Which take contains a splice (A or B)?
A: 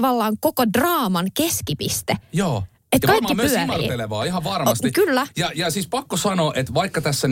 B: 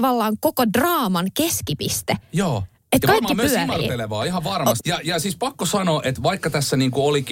B